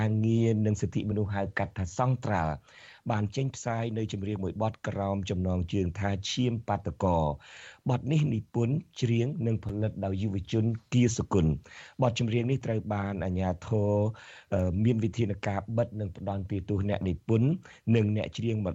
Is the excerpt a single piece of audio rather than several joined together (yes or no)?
yes